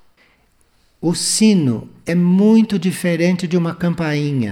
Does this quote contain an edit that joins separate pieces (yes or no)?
no